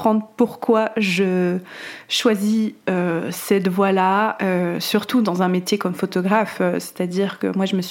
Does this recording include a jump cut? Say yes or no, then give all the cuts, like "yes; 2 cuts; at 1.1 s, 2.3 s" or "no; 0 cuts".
no; 0 cuts